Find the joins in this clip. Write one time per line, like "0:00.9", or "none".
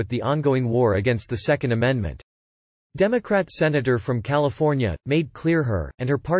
0:05.0